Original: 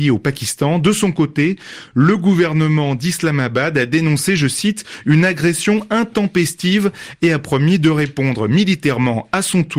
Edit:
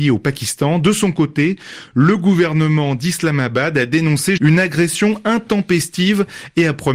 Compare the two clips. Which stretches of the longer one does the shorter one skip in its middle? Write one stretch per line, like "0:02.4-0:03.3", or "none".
0:04.4-0:05.0

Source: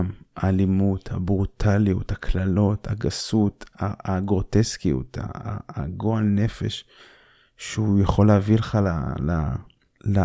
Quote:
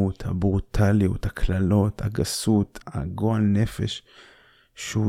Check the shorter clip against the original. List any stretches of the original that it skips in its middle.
0:03.7-0:05.6

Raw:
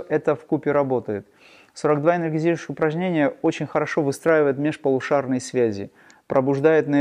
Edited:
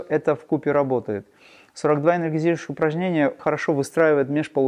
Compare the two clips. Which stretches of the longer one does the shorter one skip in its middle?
0:03.4-0:03.7

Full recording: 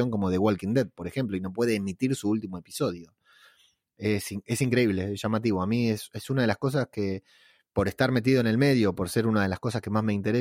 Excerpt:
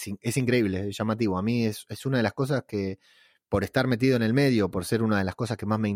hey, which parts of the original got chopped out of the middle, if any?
none

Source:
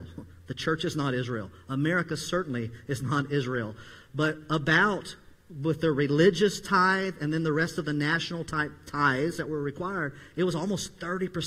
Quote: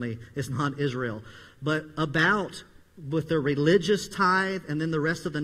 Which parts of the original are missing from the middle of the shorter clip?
none

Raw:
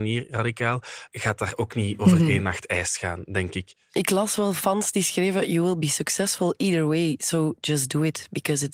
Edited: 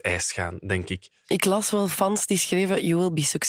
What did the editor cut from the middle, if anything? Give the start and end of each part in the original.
none

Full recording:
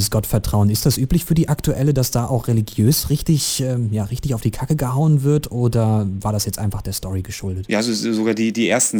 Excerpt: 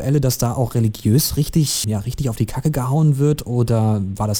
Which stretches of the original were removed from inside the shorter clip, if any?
0:03.6-0:03.9

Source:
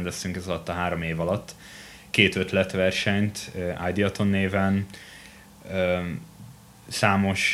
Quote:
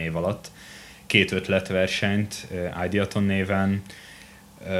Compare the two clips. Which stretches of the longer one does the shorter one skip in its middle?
none

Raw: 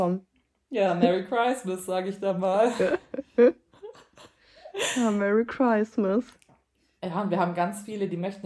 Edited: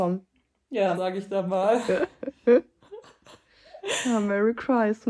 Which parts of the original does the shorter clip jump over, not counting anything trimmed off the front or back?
0:00.9-0:01.9

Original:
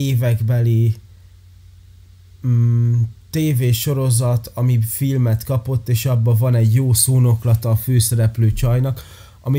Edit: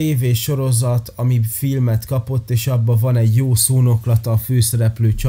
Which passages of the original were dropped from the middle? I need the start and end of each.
none

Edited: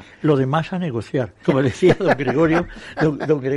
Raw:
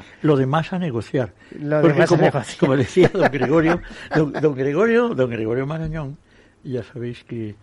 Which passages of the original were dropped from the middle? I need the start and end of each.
0:01.4-0:02.6

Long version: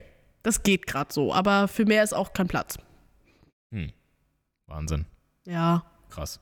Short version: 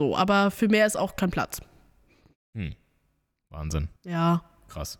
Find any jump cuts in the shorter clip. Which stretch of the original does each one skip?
0:05.1-0:05.4

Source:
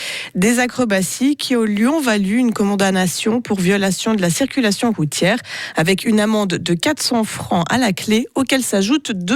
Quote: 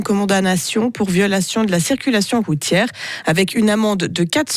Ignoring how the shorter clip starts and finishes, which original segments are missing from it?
none

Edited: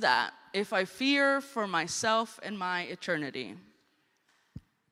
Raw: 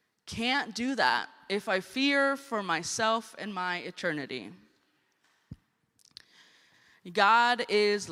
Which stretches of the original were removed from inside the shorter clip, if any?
none

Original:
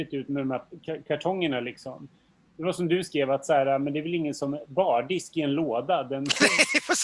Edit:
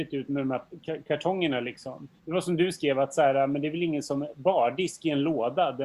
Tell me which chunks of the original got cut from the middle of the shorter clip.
0:02.2-0:02.5

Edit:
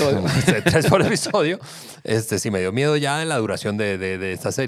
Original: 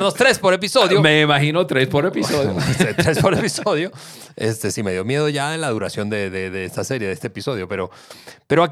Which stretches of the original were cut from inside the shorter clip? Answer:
none

